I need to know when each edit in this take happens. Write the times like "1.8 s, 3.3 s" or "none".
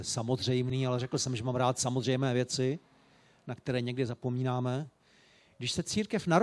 none